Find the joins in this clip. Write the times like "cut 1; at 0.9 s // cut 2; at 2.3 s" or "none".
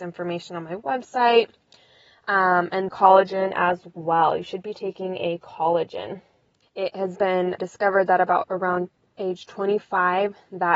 cut 1; at 2.9 s // cut 2; at 7.6 s